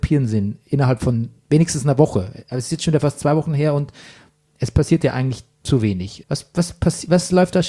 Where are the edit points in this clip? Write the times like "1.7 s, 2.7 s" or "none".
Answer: 6.2 s

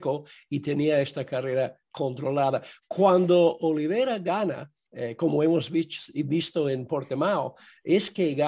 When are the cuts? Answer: none

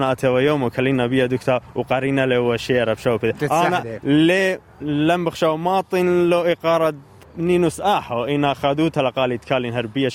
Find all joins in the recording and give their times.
3.4 s

